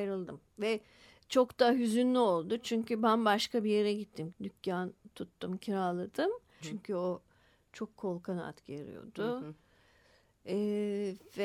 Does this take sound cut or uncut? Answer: cut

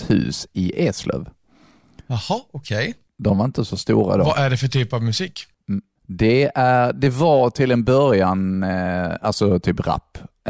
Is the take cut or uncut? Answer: uncut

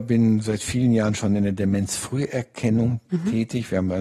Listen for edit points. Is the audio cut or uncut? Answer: uncut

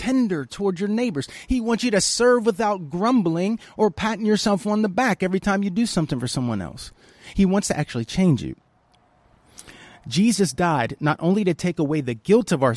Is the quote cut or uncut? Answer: uncut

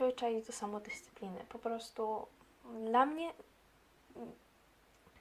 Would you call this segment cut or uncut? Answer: uncut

